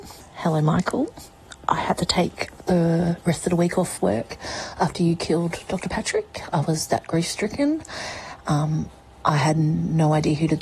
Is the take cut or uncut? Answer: uncut